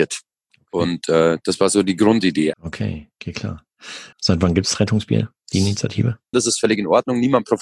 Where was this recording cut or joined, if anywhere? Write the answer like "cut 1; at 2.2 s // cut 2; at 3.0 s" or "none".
cut 1; at 2.5 s // cut 2; at 4.1 s // cut 3; at 6.3 s